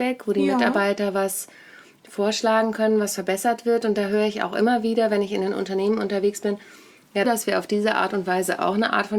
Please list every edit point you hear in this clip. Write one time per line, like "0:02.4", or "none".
0:07.2